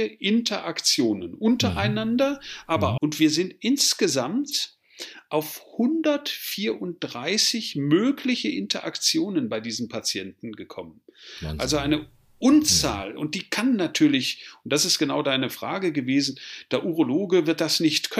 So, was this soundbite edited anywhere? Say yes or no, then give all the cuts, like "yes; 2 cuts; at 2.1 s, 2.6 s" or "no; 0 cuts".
yes; 1 cut; at 3.0 s